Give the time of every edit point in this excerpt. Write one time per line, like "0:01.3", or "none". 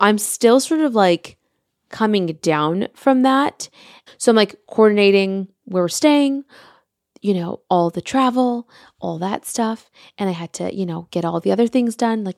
0:04.1